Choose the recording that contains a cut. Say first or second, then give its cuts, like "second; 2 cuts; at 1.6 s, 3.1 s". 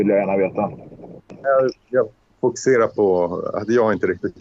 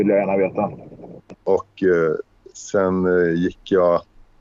second; 1 cut; at 1.3 s